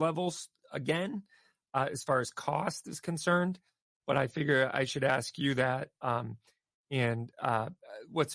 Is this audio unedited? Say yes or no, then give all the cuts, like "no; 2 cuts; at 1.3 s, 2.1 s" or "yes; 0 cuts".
yes; 0 cuts